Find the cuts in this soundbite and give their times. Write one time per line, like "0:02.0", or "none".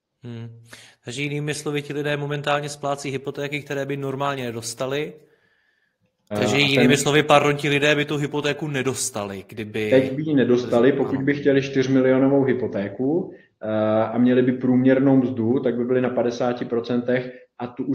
0:06.3